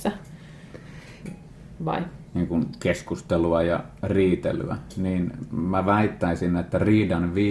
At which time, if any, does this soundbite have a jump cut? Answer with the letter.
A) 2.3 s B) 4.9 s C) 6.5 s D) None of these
A